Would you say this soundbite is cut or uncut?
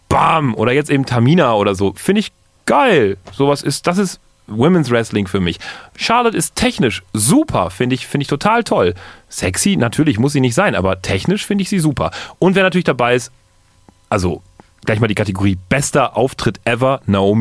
uncut